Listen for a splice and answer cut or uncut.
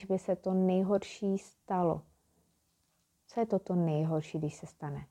uncut